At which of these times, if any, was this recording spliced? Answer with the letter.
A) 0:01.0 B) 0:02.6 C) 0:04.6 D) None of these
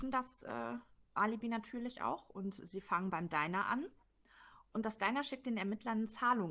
D